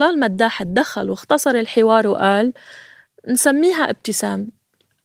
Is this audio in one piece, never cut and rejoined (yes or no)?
yes